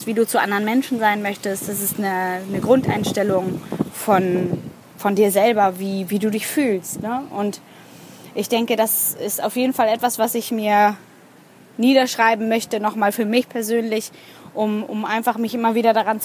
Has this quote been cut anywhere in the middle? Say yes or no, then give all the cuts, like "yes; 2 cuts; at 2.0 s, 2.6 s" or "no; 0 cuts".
no; 0 cuts